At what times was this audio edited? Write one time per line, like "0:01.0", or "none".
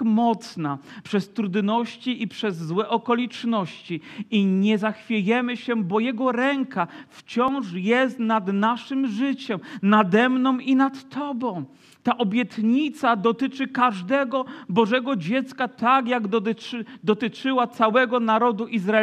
0:01.0